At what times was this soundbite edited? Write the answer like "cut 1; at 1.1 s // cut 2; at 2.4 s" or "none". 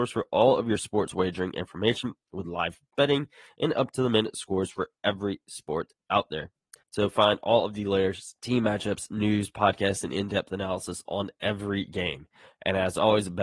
cut 1; at 6.8 s // cut 2; at 8.4 s